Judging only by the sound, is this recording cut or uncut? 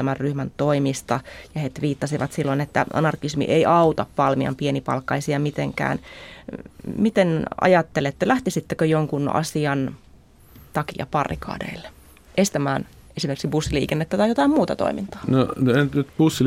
uncut